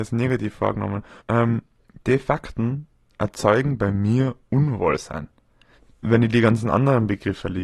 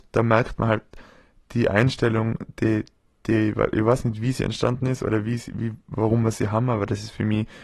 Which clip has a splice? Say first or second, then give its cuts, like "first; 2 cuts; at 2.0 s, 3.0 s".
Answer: first; 1 cut; at 1.2 s